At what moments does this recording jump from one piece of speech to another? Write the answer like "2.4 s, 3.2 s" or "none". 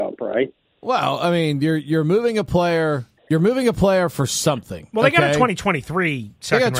3.2 s

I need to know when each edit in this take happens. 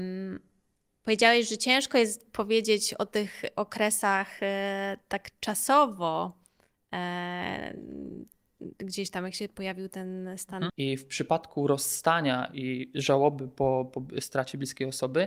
10.7 s

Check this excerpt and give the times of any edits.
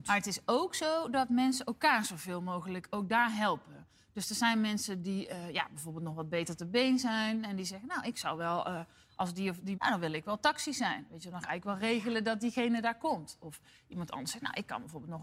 9.7 s

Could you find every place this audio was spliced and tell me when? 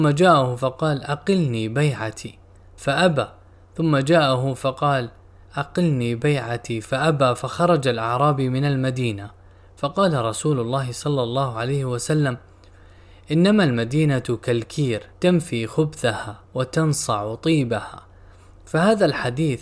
15.1 s, 16.4 s

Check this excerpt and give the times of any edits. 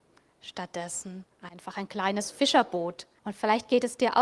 3.2 s

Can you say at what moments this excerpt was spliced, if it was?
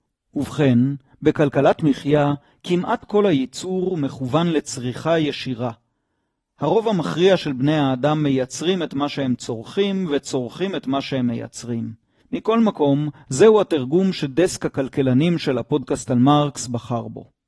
12.2 s

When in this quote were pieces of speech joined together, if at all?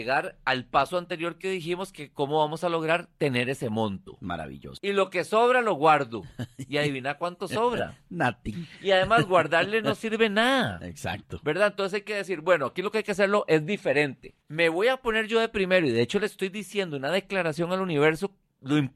4.8 s, 14.4 s

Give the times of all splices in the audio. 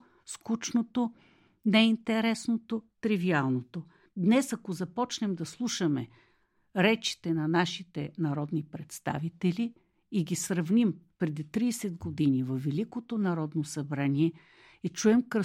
4.1 s

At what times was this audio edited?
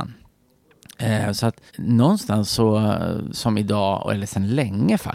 1.7 s, 3.3 s

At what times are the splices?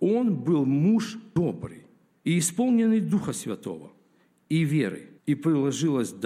5.2 s

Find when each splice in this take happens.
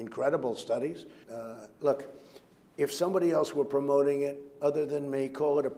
1.2 s

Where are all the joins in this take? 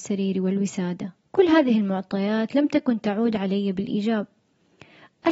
1.2 s

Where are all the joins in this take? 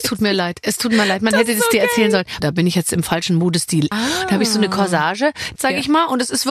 2.4 s, 3.9 s, 5.6 s

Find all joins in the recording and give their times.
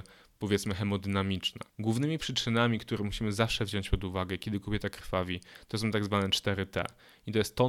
1.7 s

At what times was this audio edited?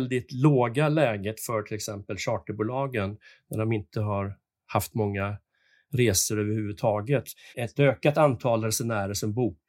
7.5 s

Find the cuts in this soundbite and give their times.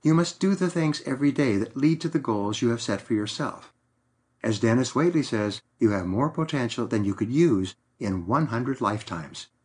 4.3 s, 5.7 s

